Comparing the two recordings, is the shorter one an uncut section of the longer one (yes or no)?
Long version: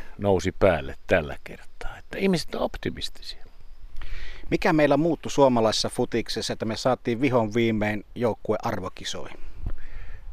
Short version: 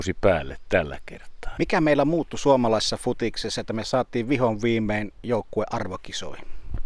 no